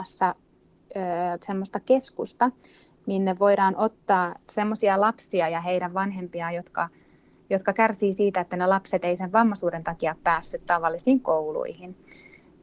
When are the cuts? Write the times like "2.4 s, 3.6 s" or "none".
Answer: none